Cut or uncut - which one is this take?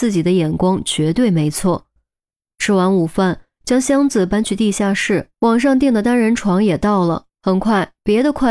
cut